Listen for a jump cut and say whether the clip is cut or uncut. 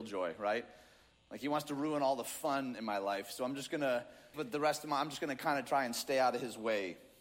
cut